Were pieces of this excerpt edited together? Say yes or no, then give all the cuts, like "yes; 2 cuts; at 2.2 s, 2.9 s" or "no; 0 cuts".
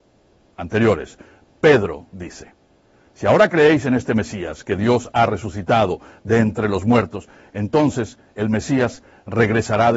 no; 0 cuts